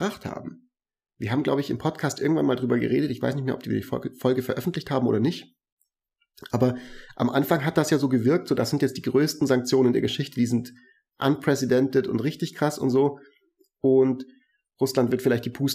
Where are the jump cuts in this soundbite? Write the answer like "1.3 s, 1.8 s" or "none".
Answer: none